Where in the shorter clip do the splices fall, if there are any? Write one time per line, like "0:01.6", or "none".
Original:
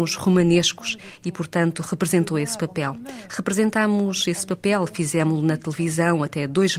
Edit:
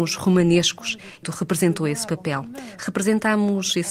0:01.2